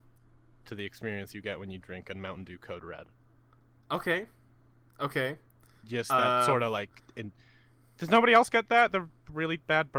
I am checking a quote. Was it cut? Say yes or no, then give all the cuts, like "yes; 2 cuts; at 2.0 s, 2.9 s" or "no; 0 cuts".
no; 0 cuts